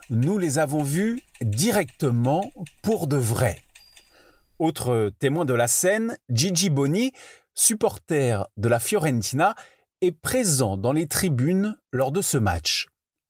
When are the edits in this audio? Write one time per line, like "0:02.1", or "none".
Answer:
none

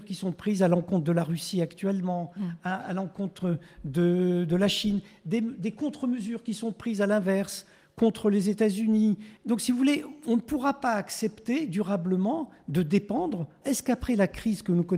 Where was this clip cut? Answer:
0:13.6

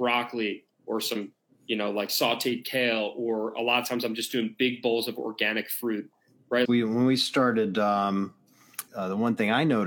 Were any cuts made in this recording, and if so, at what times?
0:06.7
0:08.9

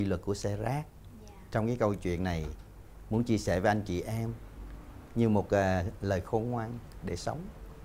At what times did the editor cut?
none

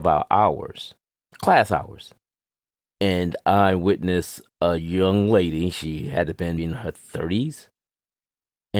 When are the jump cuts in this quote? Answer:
0:01.3
0:06.6

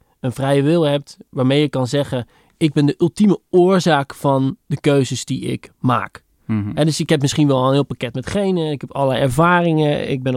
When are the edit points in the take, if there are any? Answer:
none

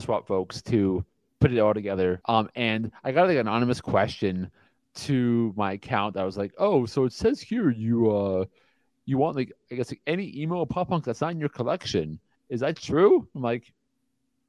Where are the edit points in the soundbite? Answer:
0:02.2

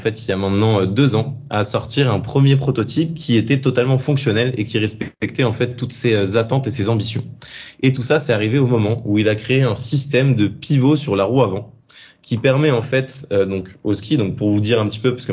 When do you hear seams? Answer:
none

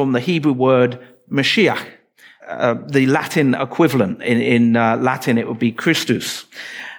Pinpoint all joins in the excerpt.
0:02.4

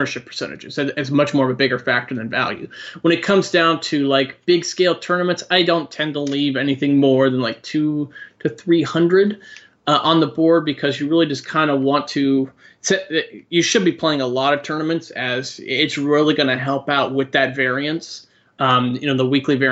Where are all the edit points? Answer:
none

